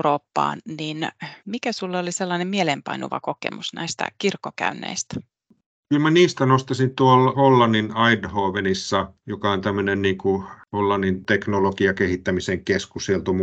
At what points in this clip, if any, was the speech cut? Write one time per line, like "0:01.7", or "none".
0:01.4
0:07.3